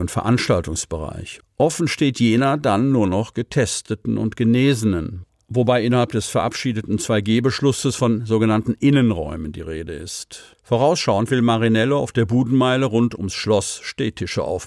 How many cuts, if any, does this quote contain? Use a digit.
0